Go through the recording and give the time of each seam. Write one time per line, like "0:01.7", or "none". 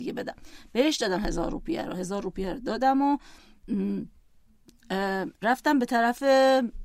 0:05.3